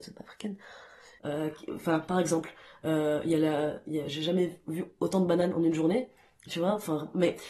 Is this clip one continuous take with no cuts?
no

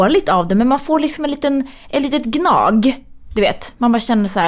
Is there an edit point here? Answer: no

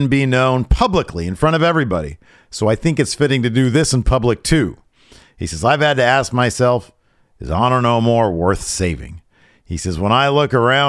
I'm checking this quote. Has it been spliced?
no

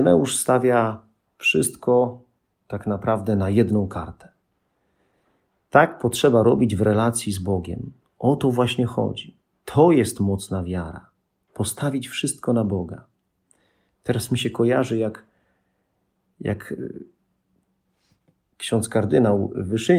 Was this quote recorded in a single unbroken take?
yes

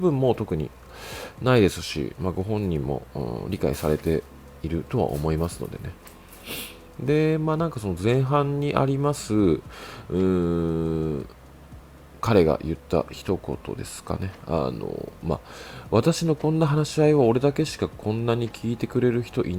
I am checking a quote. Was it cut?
no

